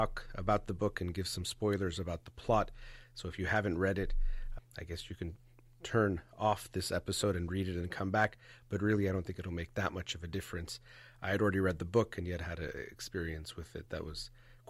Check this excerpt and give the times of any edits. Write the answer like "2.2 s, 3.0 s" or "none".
4.6 s